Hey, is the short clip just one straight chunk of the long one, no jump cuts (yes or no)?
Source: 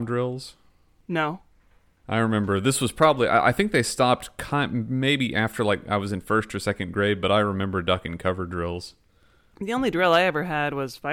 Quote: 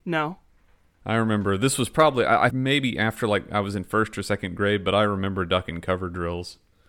no